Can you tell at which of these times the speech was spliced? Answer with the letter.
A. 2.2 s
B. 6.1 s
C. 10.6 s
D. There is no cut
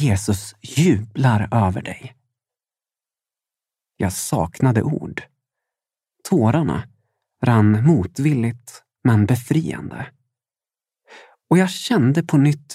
B